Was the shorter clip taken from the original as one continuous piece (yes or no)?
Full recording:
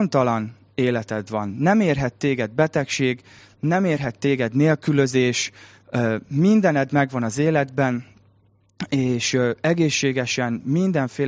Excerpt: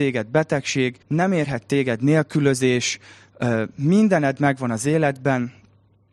no